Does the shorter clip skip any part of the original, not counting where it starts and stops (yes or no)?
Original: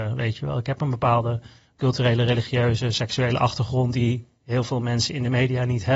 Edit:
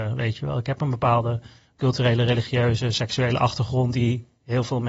no